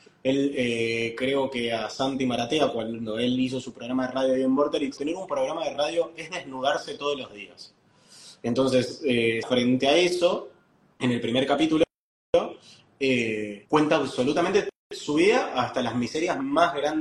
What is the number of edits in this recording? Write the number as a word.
three